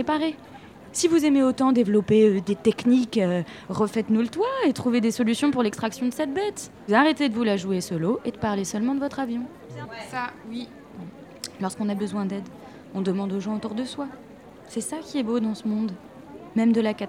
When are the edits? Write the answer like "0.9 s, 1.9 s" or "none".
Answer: 9.8 s